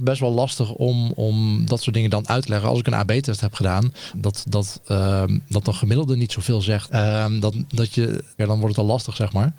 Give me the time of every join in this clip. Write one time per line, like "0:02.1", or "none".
0:04.1
0:06.9
0:08.4